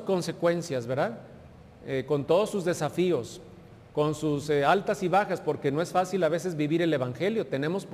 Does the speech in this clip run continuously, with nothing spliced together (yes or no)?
yes